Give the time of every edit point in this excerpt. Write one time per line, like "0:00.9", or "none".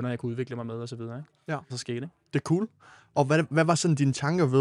0:01.7